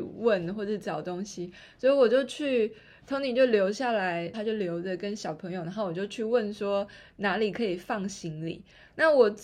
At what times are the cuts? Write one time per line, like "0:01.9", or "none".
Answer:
0:04.3